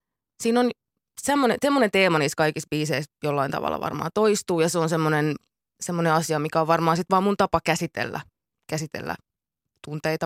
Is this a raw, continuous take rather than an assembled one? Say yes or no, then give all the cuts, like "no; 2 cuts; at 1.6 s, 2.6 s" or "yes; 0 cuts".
yes; 0 cuts